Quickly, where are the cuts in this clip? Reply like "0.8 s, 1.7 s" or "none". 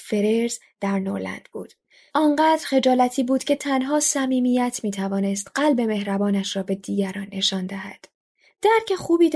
2.1 s